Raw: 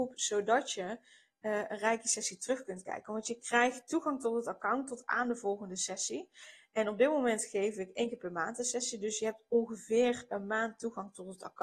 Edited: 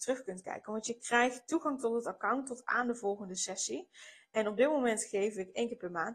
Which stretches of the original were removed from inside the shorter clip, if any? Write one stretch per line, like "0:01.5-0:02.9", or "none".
none

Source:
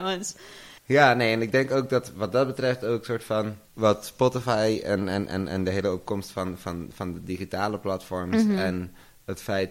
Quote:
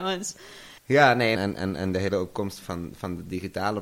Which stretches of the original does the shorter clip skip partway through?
0:01.3-0:05.1
0:06.3-0:06.6

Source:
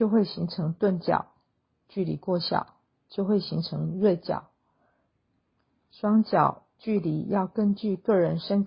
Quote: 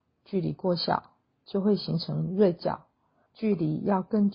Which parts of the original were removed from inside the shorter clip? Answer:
0:04.9-0:06.7

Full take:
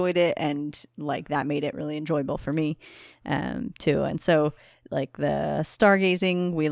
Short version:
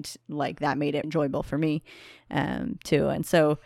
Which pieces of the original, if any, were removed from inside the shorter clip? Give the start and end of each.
0:01.7-0:02.0

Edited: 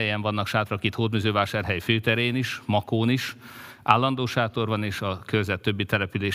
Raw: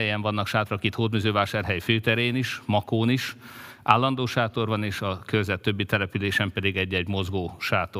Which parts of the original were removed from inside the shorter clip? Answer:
none

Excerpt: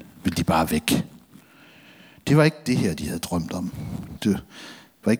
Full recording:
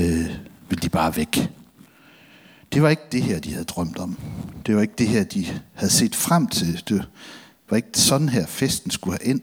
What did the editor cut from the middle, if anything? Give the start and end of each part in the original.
0:04.6-0:06.8

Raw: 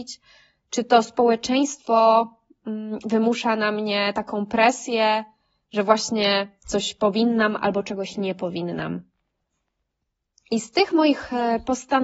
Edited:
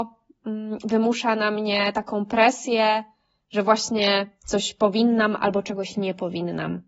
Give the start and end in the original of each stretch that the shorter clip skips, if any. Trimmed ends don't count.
none

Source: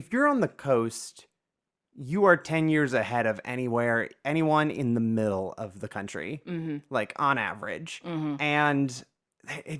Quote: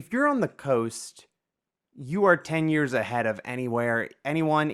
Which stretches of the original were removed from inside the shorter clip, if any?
none

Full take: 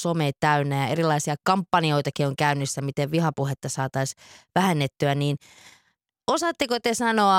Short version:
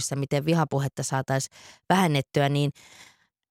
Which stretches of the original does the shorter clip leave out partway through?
none

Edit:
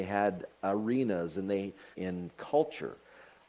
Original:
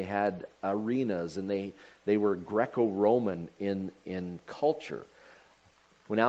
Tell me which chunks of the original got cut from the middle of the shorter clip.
0:01.9-0:04.0

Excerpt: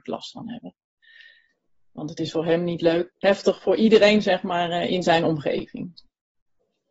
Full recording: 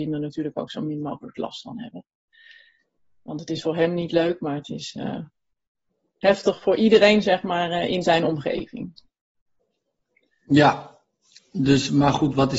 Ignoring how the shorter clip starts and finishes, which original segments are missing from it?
0:04.4-0:06.1

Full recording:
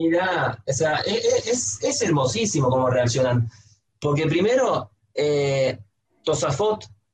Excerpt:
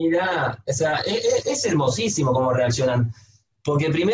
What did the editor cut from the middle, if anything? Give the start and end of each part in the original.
0:01.4-0:01.8

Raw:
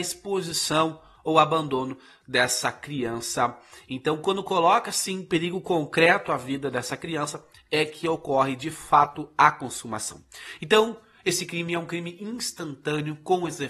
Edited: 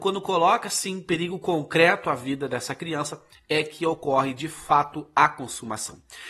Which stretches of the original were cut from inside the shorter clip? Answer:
none

